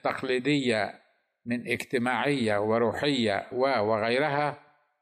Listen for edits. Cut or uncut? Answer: cut